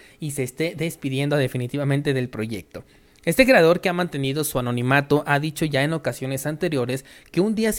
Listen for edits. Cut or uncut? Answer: uncut